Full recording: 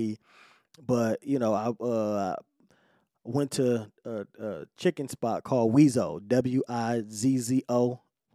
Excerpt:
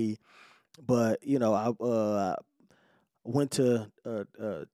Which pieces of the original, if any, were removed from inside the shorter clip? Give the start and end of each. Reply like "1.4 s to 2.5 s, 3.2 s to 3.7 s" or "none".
none

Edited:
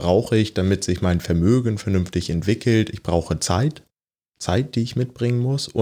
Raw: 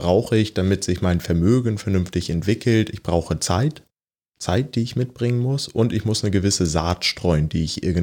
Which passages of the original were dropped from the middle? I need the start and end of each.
none

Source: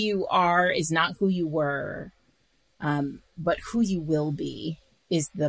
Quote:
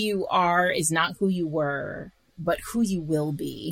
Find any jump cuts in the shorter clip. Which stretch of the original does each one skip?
2.3 s to 3.3 s

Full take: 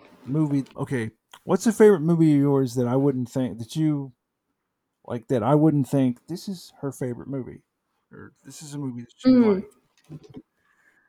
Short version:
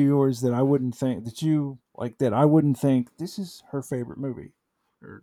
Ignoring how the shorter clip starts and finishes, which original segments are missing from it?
4.2 s to 5.0 s

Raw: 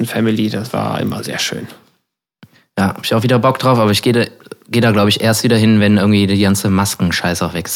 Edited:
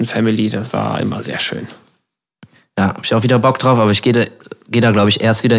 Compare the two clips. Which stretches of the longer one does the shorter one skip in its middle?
none

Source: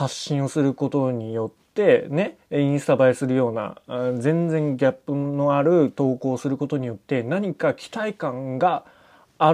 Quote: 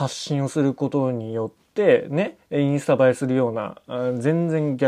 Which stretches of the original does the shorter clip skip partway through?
none

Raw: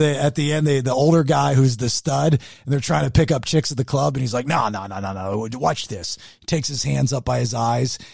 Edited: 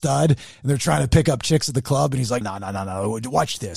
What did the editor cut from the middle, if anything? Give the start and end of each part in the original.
4.4 s to 4.7 s

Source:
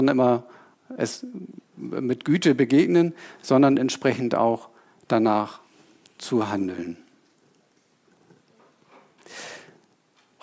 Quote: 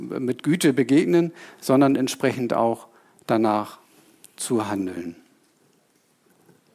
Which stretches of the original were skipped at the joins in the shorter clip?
none

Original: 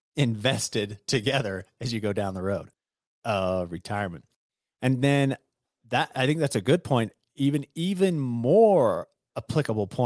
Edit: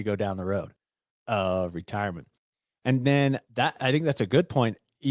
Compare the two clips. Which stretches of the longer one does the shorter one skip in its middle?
5.4 s to 5.8 s

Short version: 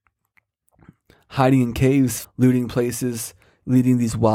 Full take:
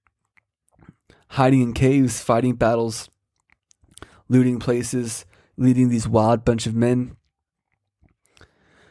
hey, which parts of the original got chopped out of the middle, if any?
2.2 s to 4.2 s

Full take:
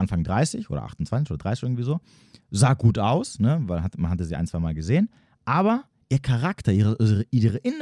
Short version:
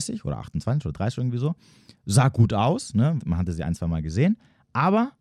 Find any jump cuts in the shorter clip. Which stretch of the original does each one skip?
3.6 s to 3.9 s

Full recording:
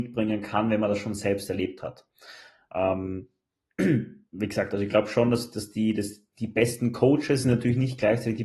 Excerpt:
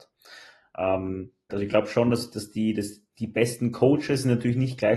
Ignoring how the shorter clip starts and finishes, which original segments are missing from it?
3.5 s to 4.7 s

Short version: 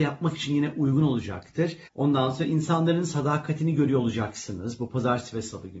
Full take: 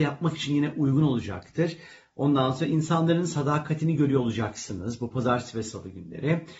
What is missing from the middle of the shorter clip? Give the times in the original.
1.9 s to 2.1 s

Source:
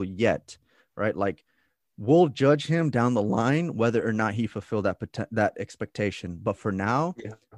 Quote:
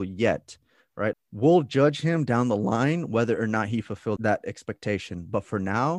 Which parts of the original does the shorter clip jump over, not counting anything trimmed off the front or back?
1.1 s to 1.8 s, 4.8 s to 5.3 s

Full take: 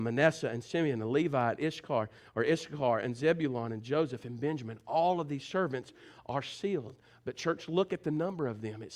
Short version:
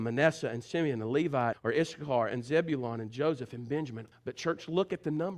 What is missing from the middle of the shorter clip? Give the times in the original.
1.5 s to 2.2 s, 4.8 s to 7.1 s

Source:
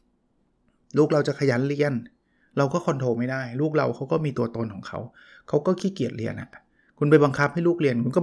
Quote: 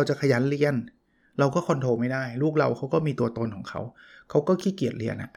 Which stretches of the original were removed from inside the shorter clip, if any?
none

